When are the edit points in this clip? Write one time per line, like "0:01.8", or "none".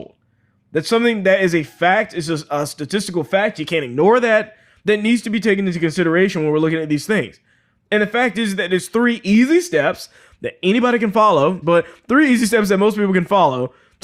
0:11.6

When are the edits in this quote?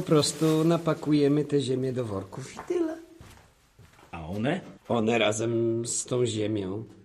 0:04.8

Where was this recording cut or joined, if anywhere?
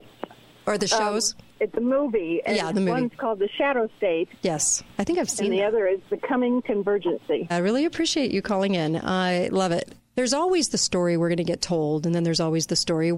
0:01.6
0:07.5
0:10.0

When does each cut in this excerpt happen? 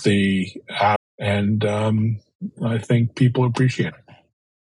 0:01.0

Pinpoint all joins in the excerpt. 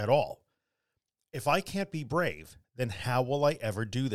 0:02.6

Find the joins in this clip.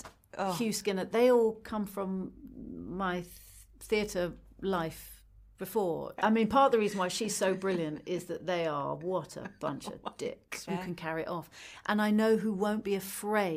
0:06.2
0:10.7

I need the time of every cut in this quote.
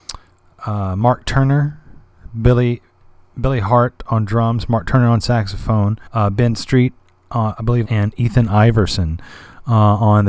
0:06.1
0:07.8

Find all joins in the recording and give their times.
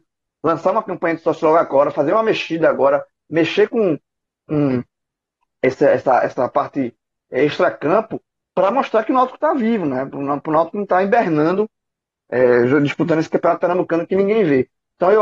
none

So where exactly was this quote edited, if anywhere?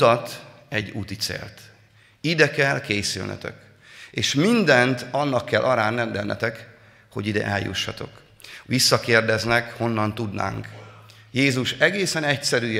0:08.6

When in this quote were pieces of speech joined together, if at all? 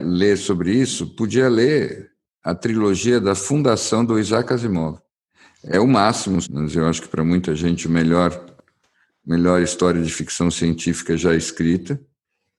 0:06.4

